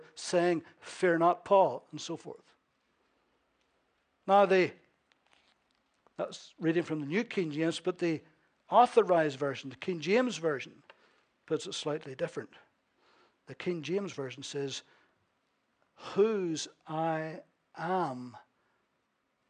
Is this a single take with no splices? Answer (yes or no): yes